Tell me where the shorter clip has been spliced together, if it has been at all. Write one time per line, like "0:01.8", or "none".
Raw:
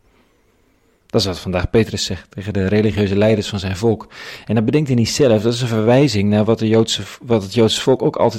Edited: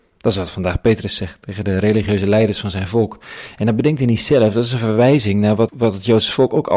0:05.7

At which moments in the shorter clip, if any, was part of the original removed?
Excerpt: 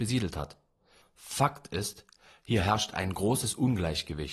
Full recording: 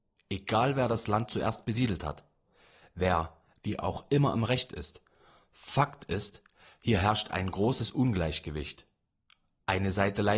0:01.0

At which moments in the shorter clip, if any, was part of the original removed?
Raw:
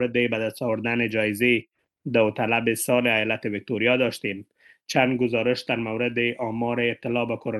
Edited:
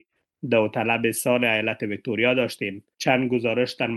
0:02.9

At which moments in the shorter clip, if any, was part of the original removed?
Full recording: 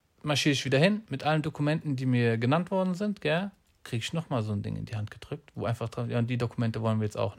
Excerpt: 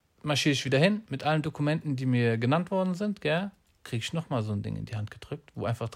none

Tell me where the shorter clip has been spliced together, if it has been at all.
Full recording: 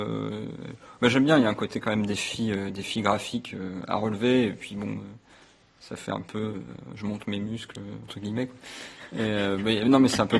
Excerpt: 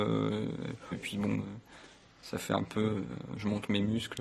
0:00.9

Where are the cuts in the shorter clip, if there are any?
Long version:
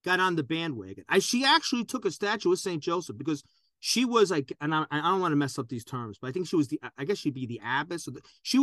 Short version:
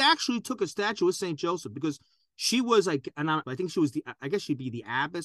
0:03.4

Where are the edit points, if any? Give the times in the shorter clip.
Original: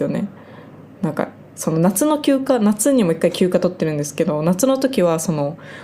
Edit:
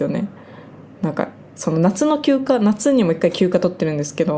none

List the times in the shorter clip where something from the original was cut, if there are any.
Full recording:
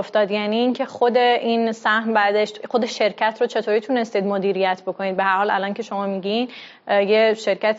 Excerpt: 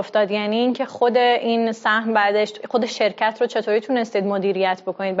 none

